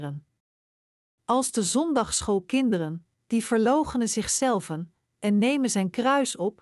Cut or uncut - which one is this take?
cut